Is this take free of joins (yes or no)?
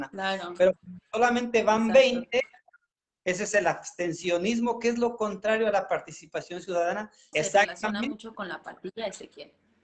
no